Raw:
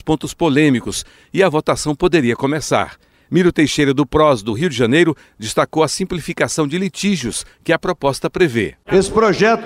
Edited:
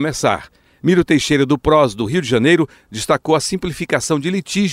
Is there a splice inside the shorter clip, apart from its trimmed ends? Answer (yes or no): no